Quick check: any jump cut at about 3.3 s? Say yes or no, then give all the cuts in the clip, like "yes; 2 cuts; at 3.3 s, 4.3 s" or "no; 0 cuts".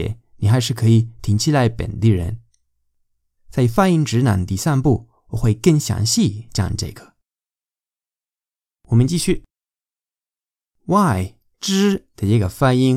no; 1 cut; at 11.5 s